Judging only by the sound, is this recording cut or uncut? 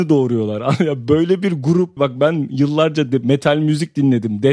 cut